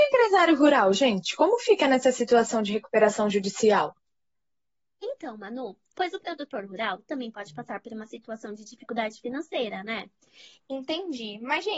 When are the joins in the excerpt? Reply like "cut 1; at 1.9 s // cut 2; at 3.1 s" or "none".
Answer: cut 1; at 5.9 s // cut 2; at 10.6 s

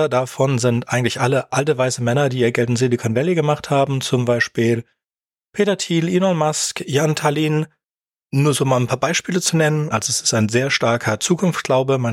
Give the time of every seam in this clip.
cut 1; at 9.9 s

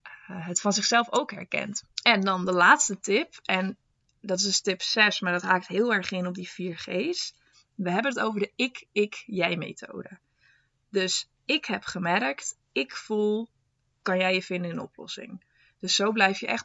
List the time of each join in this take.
cut 1; at 1.8 s

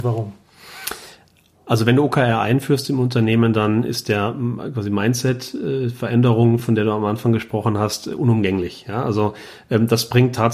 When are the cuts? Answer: none

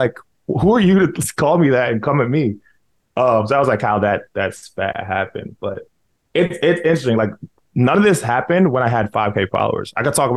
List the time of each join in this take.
none

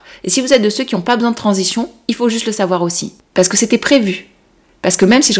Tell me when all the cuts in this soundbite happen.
cut 1; at 3.3 s

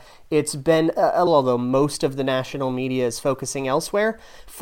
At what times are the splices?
cut 1; at 1.3 s

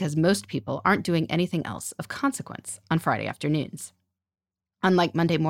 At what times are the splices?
none

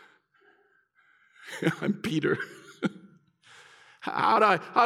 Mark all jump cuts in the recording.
none

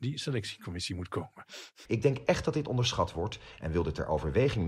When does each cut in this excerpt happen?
cut 1; at 1.9 s

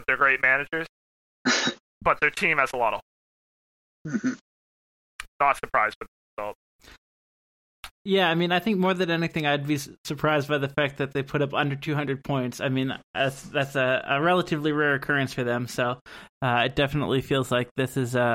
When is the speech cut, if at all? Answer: cut 1; at 8.0 s

